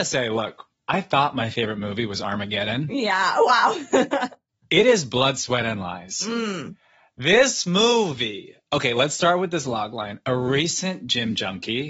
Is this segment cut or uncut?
uncut